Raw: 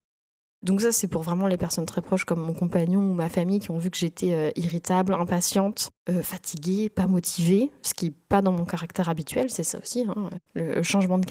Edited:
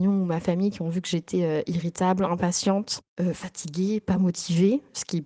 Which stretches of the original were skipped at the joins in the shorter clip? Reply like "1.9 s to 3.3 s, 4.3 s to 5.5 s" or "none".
none